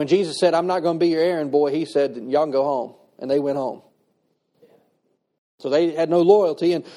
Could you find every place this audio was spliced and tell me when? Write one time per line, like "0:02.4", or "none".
none